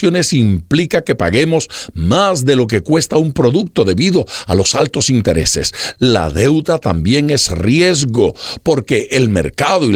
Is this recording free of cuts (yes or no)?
no